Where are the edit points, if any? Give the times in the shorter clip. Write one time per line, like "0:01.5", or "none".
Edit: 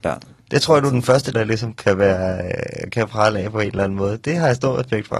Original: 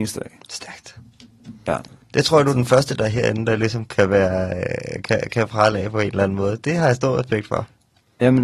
0:01.3
0:02.9